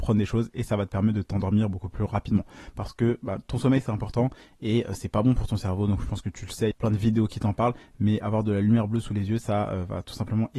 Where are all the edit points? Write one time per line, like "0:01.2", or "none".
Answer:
0:06.7